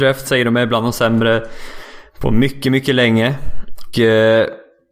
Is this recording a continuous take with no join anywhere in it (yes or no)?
no